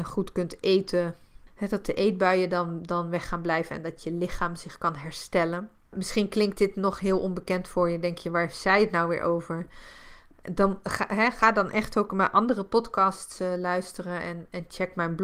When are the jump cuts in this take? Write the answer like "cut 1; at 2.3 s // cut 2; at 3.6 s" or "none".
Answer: none